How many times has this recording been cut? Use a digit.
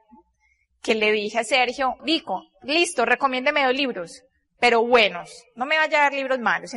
1